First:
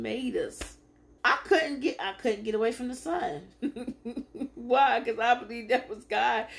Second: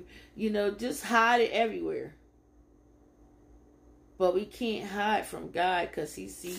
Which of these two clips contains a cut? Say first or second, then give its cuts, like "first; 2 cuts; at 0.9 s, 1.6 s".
first; 1 cut; at 1.2 s